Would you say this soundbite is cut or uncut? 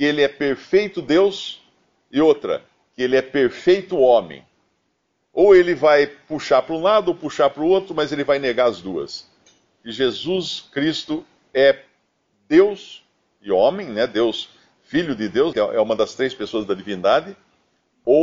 cut